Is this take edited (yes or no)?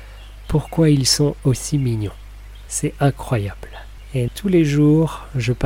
yes